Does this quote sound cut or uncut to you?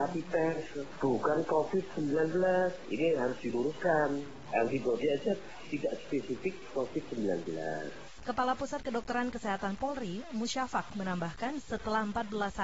cut